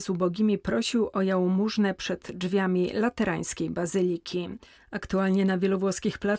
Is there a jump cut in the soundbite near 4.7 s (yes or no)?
yes